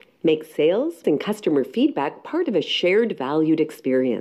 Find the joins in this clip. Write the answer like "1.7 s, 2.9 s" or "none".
1.0 s